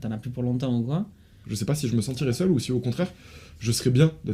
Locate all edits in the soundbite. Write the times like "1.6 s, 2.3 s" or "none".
1.4 s